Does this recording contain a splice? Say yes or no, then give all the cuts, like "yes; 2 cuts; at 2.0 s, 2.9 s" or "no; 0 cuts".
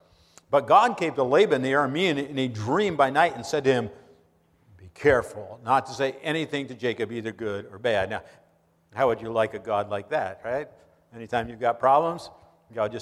no; 0 cuts